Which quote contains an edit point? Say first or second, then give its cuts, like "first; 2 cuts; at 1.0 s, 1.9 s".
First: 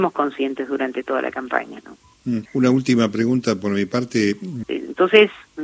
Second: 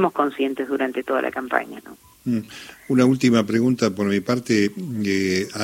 first; 2 cuts; at 2.5 s, 4.6 s